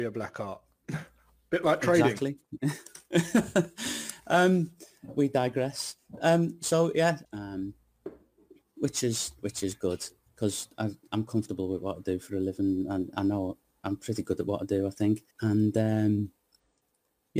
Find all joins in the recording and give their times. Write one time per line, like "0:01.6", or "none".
0:07.2
0:15.3